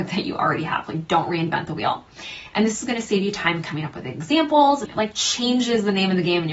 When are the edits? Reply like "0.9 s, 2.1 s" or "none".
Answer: 4.9 s